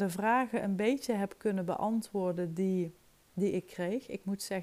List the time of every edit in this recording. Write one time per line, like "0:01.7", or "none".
none